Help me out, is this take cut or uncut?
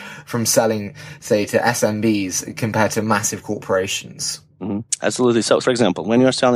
cut